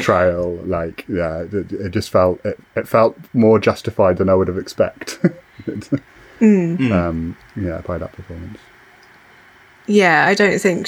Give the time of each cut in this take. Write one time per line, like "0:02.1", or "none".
none